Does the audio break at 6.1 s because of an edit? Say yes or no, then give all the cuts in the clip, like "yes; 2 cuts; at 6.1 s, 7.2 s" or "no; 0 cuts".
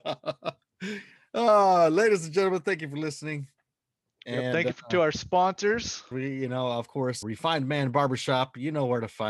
yes; 2 cuts; at 6.1 s, 7.2 s